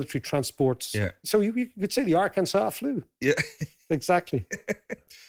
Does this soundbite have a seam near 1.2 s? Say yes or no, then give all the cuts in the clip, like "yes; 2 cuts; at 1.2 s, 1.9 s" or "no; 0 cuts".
yes; 1 cut; at 1.2 s